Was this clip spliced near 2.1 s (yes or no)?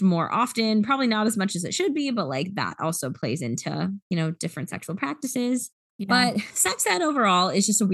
no